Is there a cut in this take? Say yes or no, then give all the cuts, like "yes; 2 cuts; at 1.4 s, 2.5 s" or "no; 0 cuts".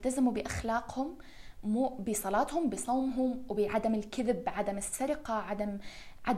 no; 0 cuts